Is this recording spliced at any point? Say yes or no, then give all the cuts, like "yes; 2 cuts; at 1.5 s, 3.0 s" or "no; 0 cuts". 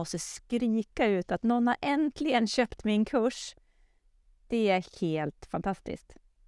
no; 0 cuts